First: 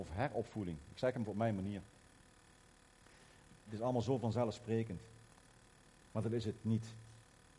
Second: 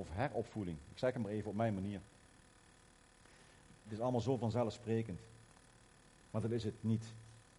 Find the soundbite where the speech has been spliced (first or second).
first